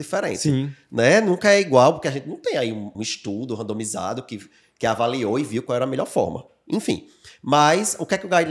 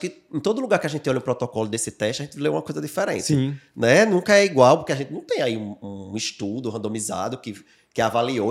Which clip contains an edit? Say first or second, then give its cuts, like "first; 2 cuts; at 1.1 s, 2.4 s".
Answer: first; 1 cut; at 2.9 s